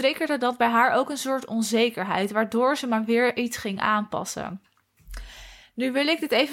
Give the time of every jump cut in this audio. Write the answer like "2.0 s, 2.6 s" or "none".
none

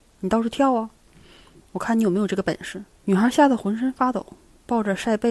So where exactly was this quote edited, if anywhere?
1.6 s, 3.0 s

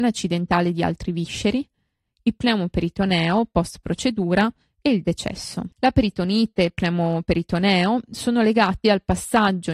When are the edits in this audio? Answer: 5.7 s

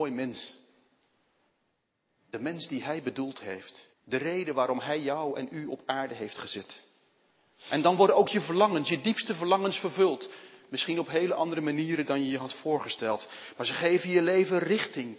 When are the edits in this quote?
3.9 s

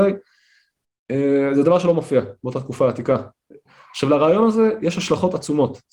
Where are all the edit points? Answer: none

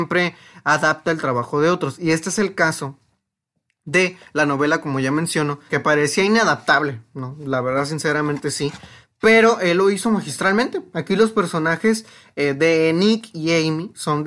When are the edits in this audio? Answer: 5.7 s

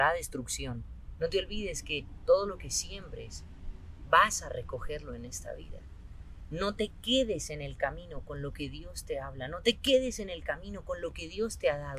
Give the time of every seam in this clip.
1.2 s

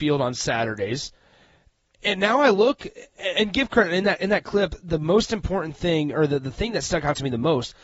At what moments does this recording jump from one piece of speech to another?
none

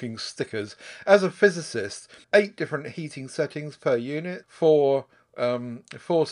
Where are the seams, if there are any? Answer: 2.2 s, 4.4 s

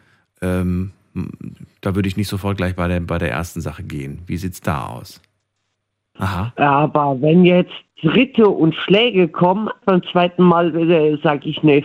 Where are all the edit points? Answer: 6.2 s, 9.8 s

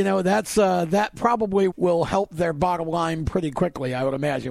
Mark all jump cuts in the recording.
1.7 s

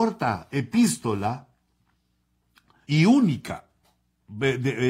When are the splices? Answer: 2.8 s

